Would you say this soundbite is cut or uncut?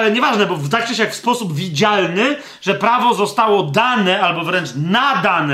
uncut